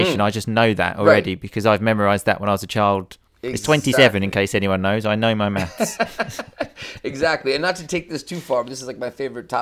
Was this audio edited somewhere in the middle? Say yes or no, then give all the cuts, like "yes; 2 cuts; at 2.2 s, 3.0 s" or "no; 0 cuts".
no; 0 cuts